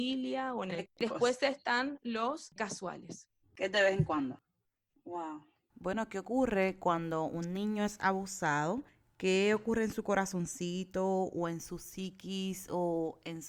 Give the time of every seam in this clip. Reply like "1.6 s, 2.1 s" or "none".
2.6 s, 4.9 s